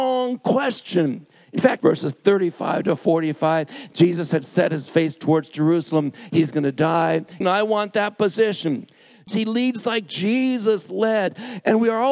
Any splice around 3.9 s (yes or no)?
no